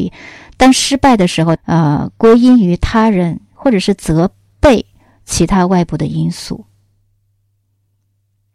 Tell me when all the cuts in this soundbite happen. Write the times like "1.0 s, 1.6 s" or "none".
1.6 s